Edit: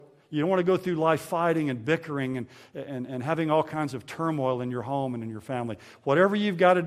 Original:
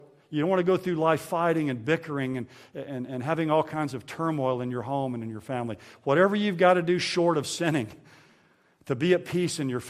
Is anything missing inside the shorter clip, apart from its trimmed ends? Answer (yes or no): no